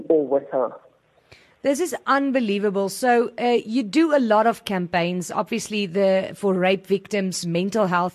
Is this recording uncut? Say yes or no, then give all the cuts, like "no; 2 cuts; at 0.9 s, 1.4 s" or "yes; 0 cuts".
yes; 0 cuts